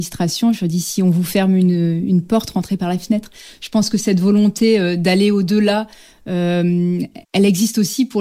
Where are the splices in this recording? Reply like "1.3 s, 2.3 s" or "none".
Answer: 7.2 s